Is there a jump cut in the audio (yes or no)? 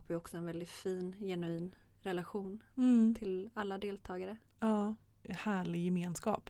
yes